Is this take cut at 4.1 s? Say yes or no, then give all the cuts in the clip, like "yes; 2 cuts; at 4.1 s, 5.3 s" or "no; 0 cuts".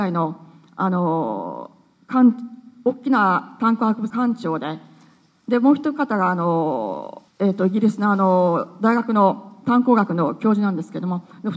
yes; 2 cuts; at 4.1 s, 7.3 s